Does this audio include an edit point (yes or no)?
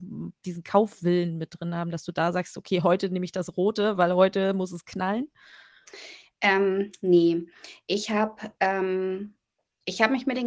no